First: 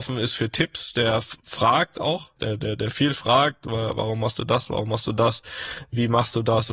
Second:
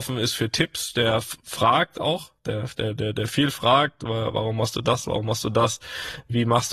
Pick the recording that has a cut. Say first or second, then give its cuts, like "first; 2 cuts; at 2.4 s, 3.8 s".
first; 1 cut; at 2.4 s